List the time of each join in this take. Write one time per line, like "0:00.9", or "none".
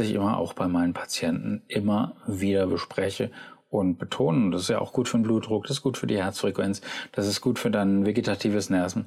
none